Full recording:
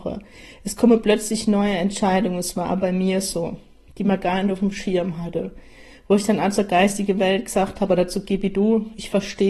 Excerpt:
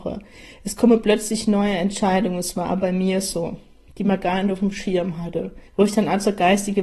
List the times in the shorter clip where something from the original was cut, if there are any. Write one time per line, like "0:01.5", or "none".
0:05.7